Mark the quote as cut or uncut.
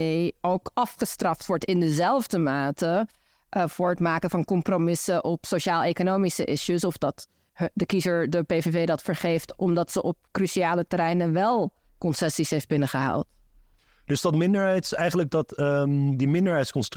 uncut